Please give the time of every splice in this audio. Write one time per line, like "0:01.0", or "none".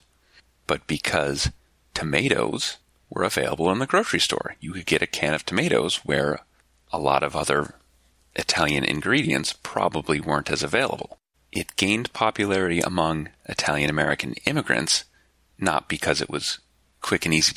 0:11.3